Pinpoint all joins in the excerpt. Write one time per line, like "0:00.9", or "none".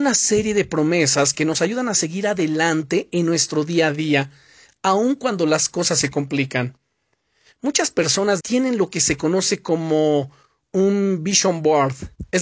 0:08.4